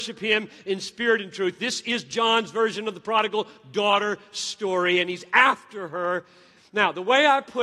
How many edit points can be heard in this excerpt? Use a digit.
1